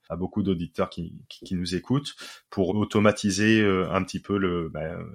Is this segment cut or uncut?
cut